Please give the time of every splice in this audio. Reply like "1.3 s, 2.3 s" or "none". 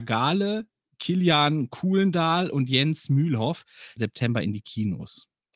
4.0 s